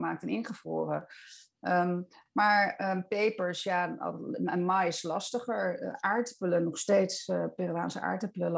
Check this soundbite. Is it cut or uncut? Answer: uncut